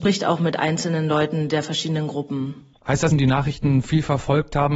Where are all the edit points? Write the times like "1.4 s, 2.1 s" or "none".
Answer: 3.1 s